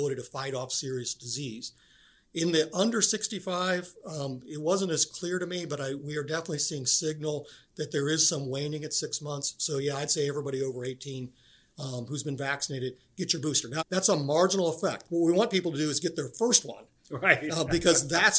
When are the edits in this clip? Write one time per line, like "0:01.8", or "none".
0:13.8
0:15.0